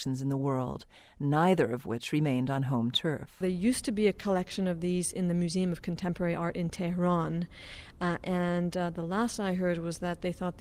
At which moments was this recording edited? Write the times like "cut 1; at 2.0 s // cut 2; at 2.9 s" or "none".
none

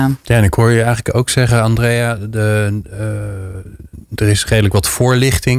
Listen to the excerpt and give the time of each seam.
none

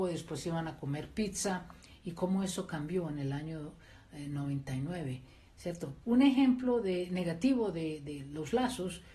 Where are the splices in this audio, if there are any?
cut 1; at 6.0 s

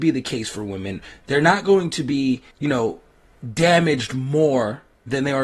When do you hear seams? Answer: cut 1; at 2.5 s

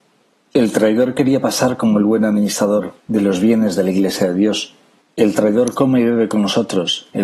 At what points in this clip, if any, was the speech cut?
cut 1; at 3.0 s // cut 2; at 5.0 s

